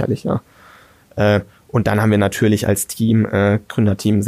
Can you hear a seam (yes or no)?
no